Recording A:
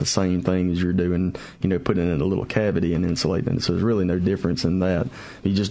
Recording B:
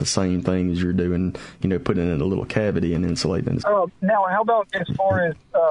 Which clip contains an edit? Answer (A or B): B